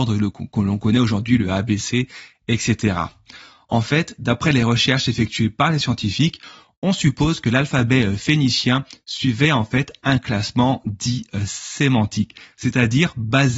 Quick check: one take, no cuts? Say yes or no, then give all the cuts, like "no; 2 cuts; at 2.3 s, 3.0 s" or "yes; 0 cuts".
yes; 0 cuts